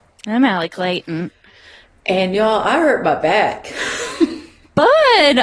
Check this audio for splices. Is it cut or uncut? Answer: uncut